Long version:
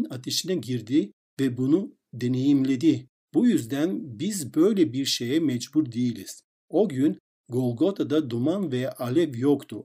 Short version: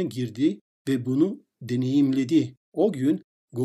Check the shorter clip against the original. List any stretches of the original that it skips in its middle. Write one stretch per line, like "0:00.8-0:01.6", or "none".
0:03.1-0:06.6